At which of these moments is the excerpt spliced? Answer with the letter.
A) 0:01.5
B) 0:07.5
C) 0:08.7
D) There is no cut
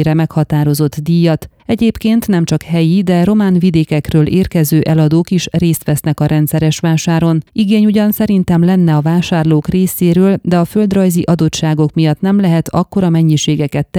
B